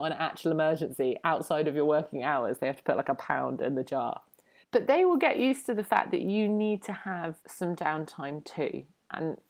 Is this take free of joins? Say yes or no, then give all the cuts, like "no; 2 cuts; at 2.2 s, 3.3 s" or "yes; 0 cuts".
no; 2 cuts; at 4.6 s, 7.4 s